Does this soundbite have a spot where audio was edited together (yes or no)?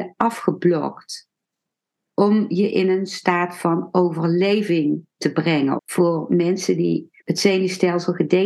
yes